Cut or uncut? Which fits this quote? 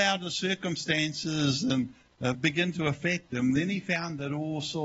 uncut